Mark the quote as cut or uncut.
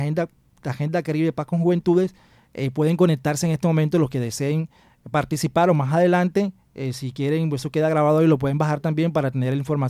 uncut